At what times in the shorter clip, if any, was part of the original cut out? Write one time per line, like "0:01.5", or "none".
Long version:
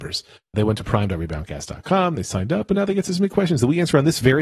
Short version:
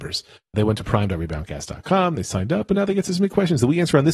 none